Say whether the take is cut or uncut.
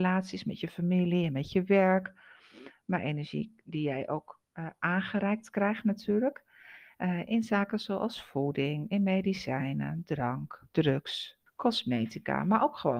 cut